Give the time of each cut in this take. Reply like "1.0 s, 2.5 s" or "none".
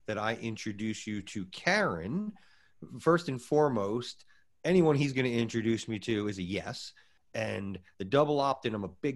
7.2 s